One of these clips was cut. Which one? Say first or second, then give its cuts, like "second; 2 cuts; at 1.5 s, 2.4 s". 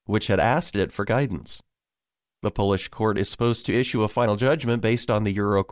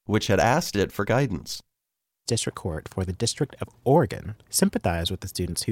second; 2 cuts; at 2.3 s, 4.4 s